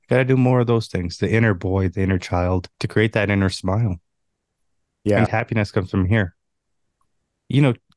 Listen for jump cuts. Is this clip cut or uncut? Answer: cut